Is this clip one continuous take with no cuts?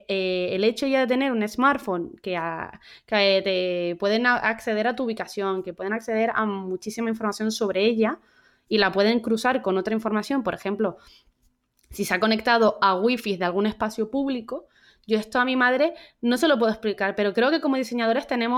yes; 0 cuts

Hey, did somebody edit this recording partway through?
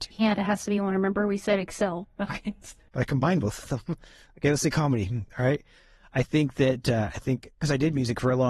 no; 0 cuts

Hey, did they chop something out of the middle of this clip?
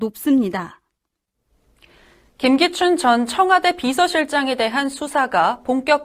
no; 0 cuts

